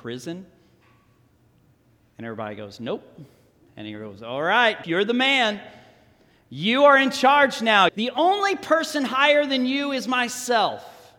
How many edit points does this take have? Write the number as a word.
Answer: two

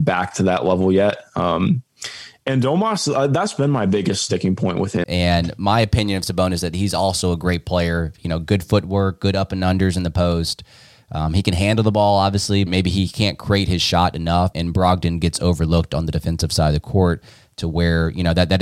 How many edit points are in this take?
three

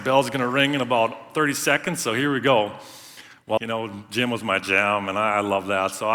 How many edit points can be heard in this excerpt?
one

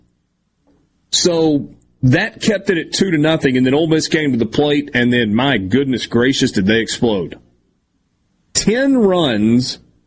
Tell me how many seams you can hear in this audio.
zero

